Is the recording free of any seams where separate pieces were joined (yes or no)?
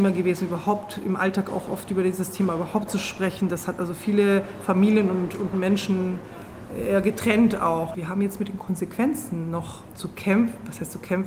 no